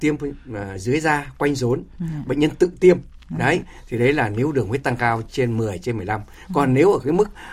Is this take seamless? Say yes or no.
yes